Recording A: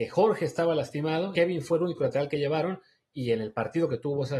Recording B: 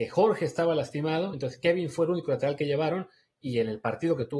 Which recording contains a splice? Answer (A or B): A